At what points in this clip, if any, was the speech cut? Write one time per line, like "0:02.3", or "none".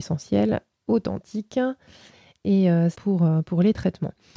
0:02.9